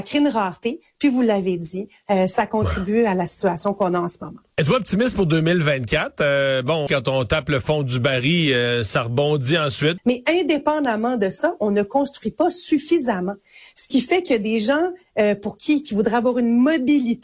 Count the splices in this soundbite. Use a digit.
3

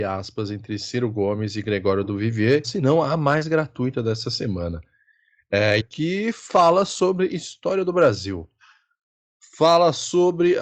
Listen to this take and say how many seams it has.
2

